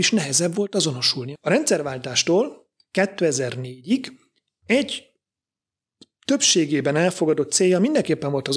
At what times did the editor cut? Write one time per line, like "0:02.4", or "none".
0:01.4